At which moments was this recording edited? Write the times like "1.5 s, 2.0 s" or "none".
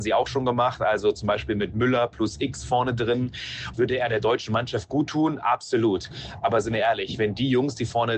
3.7 s